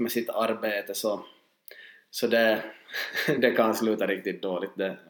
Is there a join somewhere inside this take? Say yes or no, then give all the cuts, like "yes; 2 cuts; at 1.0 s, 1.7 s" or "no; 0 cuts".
no; 0 cuts